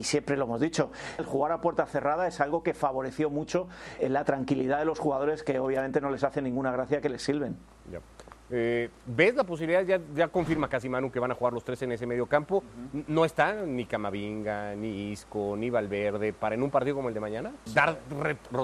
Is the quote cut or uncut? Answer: cut